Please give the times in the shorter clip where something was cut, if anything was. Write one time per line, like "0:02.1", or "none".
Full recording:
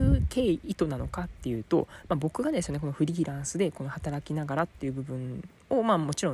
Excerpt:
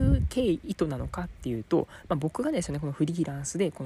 none